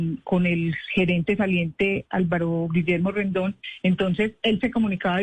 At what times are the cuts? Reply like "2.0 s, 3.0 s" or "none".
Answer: none